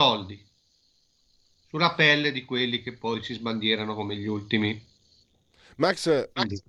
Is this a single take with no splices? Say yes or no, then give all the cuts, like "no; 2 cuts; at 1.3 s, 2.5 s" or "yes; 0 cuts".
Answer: yes; 0 cuts